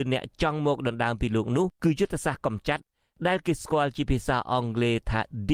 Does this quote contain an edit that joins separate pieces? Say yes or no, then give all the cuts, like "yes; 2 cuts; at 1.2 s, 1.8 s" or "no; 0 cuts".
yes; 1 cut; at 1.7 s